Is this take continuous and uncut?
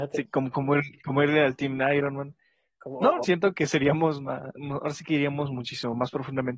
no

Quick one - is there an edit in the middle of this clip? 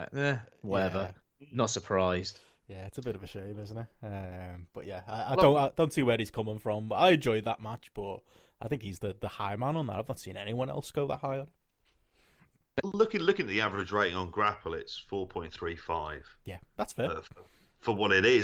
no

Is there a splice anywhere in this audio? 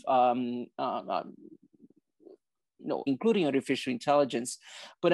yes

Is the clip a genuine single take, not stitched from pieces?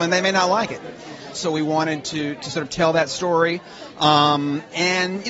no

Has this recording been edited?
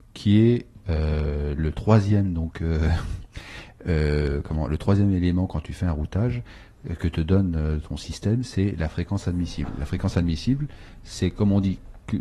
no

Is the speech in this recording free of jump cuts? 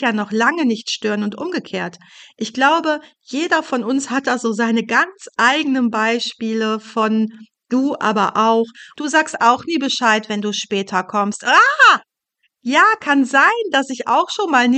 no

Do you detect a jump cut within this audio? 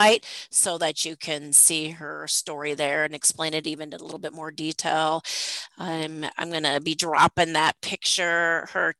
no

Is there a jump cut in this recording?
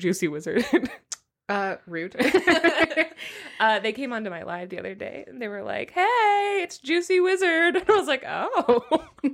no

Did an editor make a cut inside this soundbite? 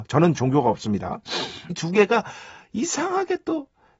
yes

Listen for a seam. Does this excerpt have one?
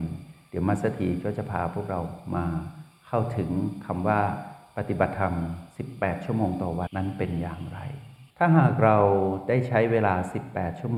yes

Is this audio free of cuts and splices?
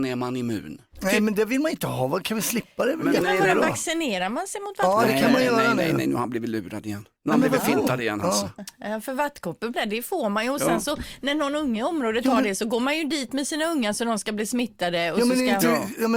no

